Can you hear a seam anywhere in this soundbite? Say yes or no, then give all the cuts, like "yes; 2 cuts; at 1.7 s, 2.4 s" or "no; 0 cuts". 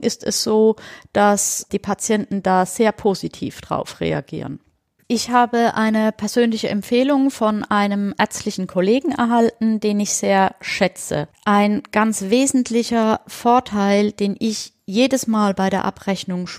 yes; 1 cut; at 5.0 s